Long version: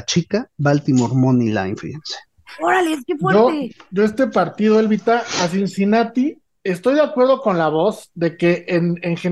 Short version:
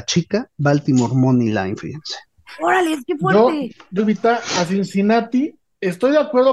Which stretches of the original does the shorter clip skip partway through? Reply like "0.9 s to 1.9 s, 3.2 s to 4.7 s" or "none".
4.0 s to 4.8 s